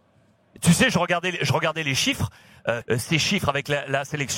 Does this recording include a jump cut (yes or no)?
yes